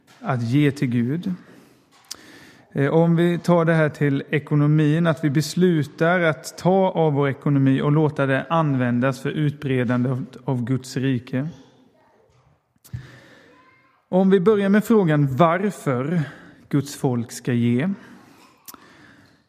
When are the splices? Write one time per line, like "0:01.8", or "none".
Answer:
none